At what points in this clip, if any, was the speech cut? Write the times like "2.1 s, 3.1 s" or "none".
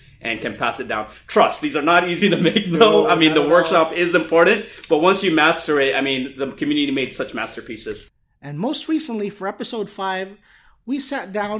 none